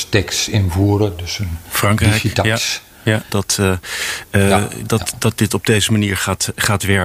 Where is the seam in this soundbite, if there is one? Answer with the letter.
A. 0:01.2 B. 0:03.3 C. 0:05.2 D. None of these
B